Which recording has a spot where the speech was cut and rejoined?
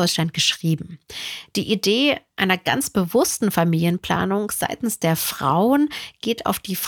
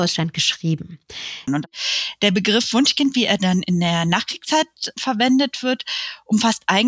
second; 1 cut; at 1.5 s

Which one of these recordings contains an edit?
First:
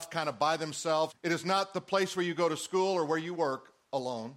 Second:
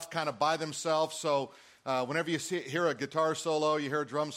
first; 1 cut; at 1.1 s

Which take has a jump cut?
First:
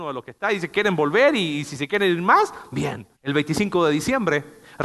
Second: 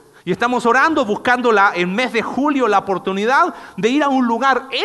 first; 1 cut; at 3.2 s

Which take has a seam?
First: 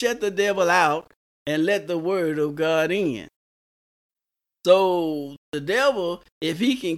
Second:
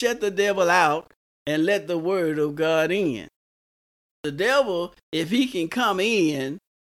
second; 1 cut; at 4.1 s

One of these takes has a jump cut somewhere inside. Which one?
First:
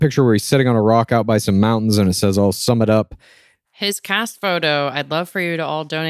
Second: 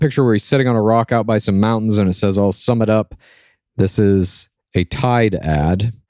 first; 1 cut; at 3.6 s

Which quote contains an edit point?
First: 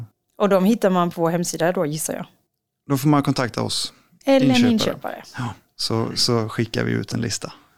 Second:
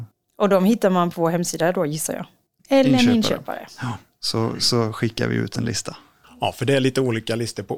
second; 1 cut; at 2.6 s

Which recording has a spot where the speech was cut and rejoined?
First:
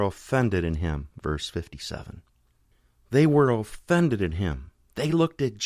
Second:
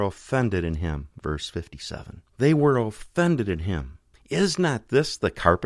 second; 2 cuts; at 2.3 s, 4.1 s

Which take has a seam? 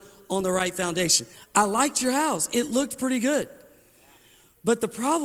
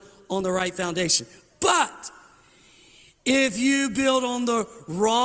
first; 1 cut; at 1.3 s

